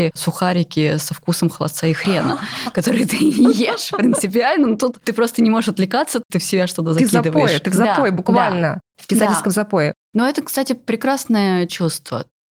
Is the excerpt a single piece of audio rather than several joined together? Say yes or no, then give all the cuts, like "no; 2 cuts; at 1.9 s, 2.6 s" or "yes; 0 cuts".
yes; 0 cuts